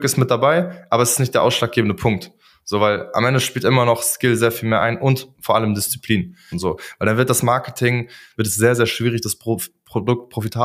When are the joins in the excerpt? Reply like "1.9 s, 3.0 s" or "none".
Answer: 6.5 s, 8.3 s